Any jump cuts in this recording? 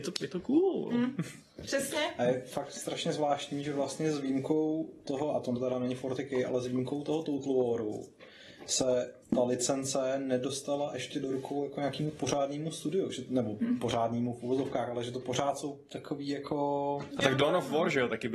yes; 2 cuts; at 9.2 s, 17.1 s

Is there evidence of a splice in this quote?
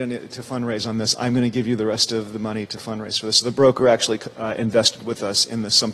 no; 0 cuts

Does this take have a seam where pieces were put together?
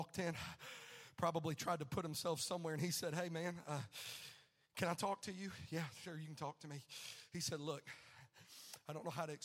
no; 0 cuts

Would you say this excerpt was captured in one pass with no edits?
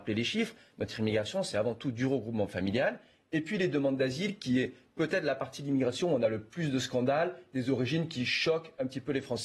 yes; 0 cuts

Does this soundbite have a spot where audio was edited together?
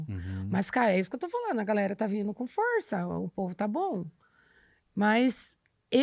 no; 0 cuts

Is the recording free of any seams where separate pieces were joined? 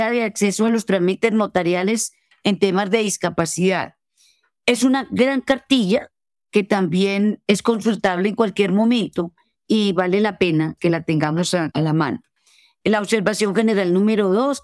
yes; 0 cuts

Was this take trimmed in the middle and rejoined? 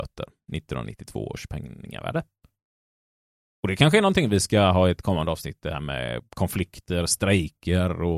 no; 0 cuts

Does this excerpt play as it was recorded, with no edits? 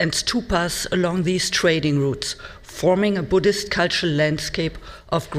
yes; 0 cuts

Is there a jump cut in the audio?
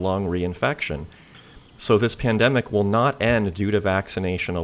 no; 0 cuts

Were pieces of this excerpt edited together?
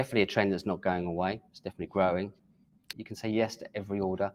yes; 1 cut; at 2.9 s

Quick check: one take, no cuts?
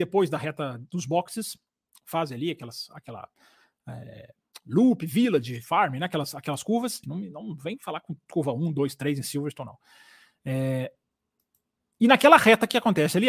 no; 1 cut; at 7.0 s

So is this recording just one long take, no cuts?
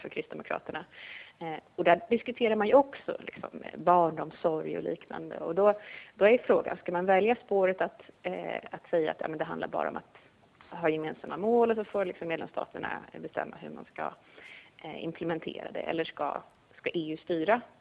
yes; 0 cuts

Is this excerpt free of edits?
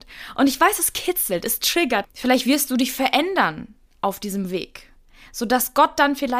no; 1 cut; at 2.0 s

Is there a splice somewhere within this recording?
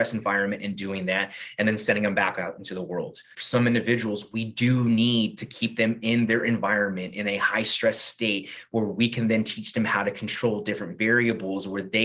yes; 1 cut; at 3.3 s

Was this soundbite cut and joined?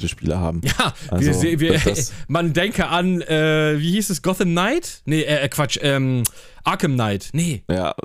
no; 0 cuts

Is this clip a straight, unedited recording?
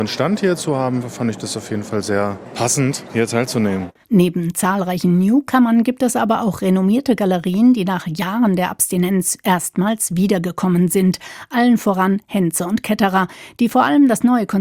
yes; 0 cuts

